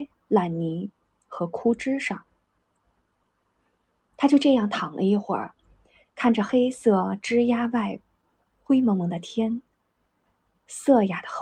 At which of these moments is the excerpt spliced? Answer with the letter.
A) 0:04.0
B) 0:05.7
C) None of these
C